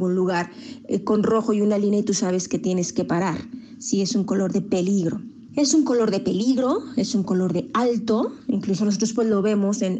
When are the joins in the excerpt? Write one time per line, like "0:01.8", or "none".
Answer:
0:05.5